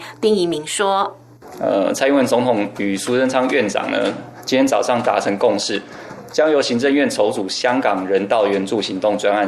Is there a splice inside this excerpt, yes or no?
no